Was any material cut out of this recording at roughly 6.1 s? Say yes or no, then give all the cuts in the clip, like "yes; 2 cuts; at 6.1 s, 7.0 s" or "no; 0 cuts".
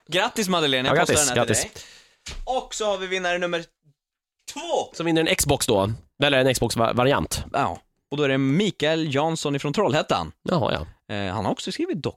no; 0 cuts